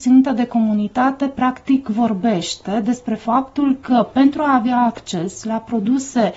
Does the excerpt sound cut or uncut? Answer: uncut